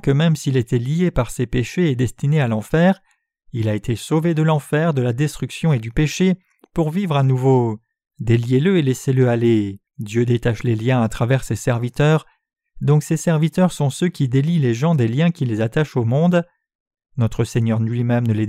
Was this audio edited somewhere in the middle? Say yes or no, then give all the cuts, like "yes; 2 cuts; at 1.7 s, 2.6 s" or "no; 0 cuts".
yes; 2 cuts; at 8.1 s, 9.9 s